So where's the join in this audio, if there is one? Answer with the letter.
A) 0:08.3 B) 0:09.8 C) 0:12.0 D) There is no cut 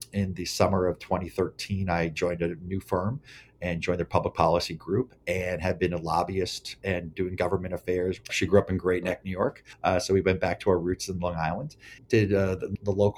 A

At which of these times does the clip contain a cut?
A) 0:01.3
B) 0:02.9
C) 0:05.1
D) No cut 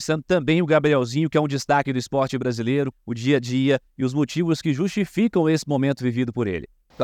B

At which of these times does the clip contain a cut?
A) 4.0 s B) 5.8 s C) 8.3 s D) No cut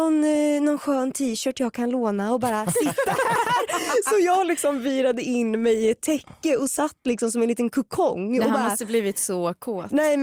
D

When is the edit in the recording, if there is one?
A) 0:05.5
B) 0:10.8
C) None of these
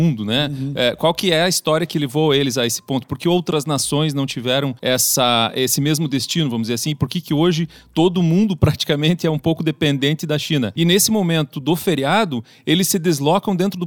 B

